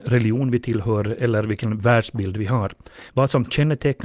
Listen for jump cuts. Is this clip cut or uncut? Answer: cut